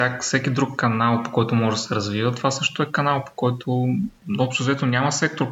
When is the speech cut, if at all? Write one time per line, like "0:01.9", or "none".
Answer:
none